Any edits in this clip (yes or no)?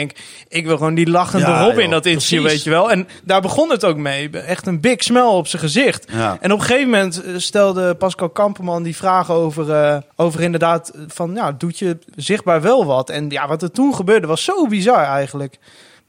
yes